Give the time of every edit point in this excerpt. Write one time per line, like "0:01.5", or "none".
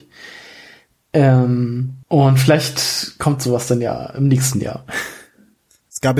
0:02.0